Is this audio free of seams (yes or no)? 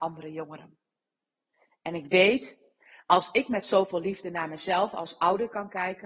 yes